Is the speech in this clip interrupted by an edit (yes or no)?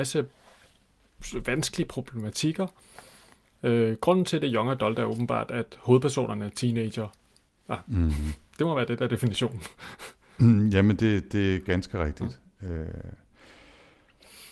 no